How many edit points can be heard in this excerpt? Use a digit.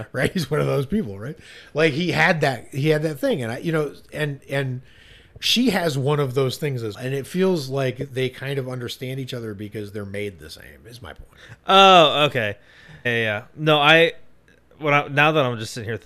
2